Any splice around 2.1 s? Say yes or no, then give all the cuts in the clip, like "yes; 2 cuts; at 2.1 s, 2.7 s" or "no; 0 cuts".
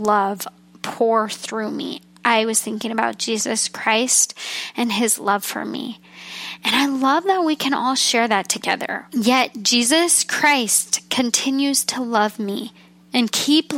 no; 2 cuts; at 6.6 s, 9.1 s